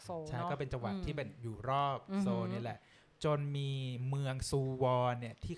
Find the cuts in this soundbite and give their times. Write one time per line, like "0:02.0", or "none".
none